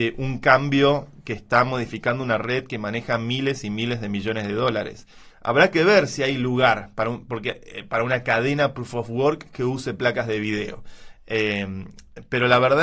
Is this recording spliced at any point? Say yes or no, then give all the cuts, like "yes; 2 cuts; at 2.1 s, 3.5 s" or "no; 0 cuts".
yes; 2 cuts; at 5.3 s, 11.2 s